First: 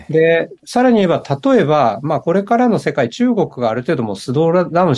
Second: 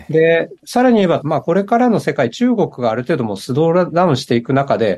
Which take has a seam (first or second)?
second